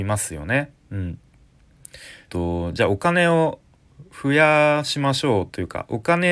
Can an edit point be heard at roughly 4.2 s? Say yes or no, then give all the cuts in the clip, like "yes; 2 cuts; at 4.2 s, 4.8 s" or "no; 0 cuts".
no; 1 cut; at 2.3 s